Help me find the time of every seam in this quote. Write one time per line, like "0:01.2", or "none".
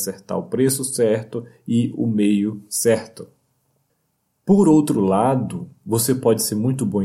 none